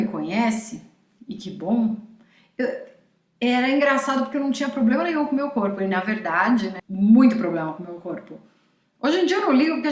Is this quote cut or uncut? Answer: cut